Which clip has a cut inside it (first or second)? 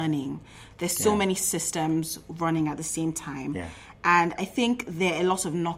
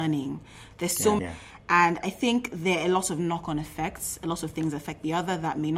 second